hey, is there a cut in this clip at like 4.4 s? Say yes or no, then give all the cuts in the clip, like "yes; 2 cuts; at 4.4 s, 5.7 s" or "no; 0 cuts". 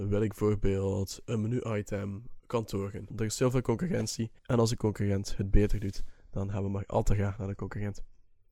yes; 2 cuts; at 3.1 s, 4.4 s